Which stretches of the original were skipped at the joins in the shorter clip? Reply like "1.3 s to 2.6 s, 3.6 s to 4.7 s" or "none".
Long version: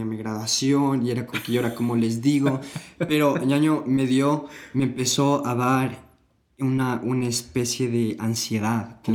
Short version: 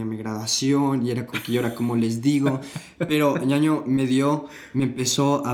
none